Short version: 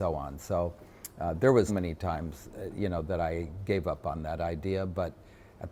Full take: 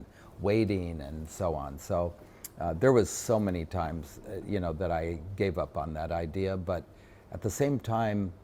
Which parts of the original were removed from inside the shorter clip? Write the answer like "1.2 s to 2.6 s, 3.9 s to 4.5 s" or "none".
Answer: 3.1 s to 3.4 s